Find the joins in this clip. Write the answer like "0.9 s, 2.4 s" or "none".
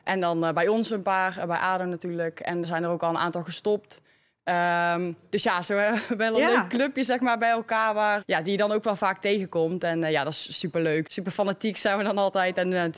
2.6 s, 8.2 s, 11.1 s